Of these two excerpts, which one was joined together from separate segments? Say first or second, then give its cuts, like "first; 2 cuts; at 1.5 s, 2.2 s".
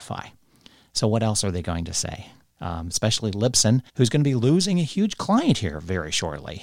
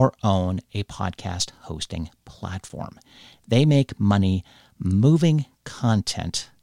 first; 1 cut; at 3.9 s